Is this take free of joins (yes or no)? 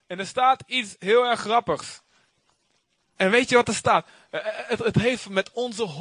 no